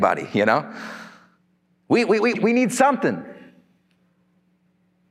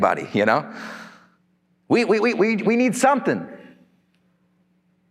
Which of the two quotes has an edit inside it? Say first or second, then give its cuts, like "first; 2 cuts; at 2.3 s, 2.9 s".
first; 1 cut; at 2.3 s